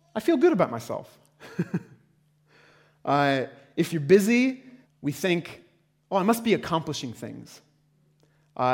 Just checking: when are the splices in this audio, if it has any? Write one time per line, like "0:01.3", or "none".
0:04.8